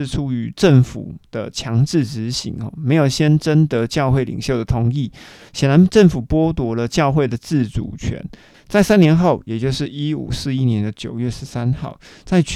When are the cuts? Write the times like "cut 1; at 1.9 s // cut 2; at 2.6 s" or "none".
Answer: cut 1; at 8.5 s